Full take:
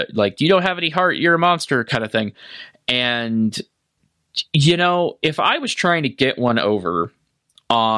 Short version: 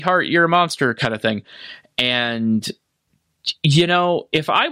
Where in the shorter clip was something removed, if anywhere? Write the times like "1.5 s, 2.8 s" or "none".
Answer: none